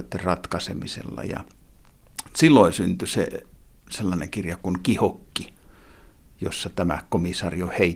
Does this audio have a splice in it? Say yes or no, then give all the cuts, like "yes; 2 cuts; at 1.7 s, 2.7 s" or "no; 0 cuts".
no; 0 cuts